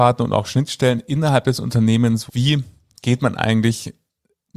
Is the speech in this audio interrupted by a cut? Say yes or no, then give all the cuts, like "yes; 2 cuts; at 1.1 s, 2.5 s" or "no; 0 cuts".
yes; 1 cut; at 2.3 s